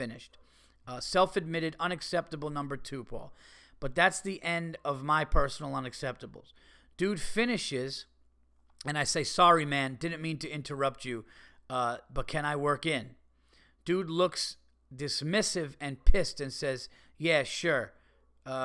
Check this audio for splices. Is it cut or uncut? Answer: uncut